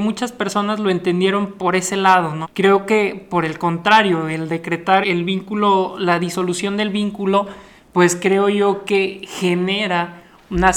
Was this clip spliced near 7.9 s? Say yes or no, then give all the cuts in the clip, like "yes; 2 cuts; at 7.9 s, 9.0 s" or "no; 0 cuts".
no; 2 cuts; at 2.4 s, 5.0 s